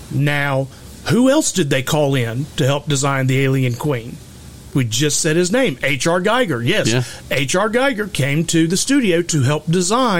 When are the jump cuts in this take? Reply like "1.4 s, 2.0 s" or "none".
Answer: 4.7 s